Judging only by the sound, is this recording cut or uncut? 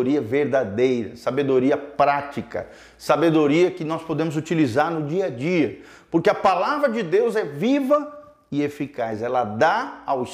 uncut